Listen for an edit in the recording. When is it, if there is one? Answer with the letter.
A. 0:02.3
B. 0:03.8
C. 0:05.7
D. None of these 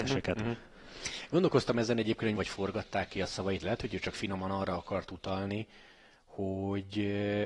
A